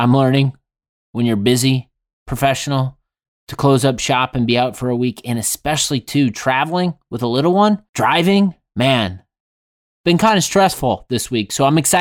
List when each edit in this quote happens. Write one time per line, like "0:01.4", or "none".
none